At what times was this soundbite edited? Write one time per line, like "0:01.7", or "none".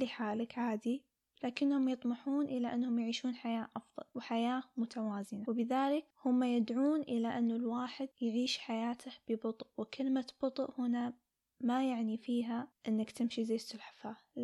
0:08.1

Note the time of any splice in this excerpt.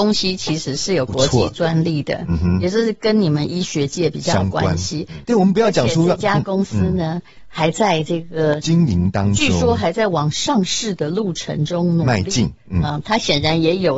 0:05.2

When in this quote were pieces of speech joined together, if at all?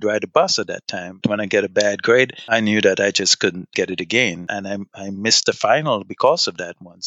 0:01.2
0:04.5

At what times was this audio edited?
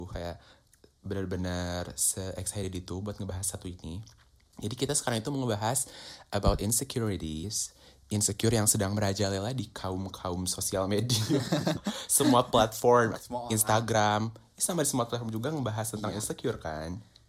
0:13.1

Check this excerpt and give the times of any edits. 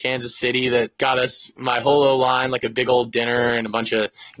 0:00.9

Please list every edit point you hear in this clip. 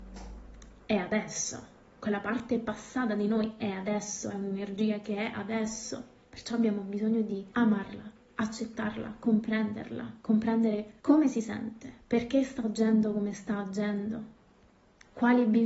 0:07.5
0:11.0

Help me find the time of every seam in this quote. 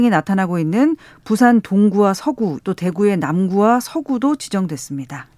0:02.6

